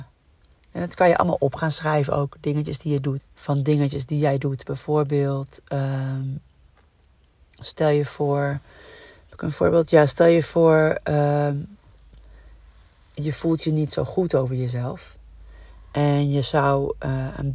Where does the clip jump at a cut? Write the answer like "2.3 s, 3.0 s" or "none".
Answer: 3.2 s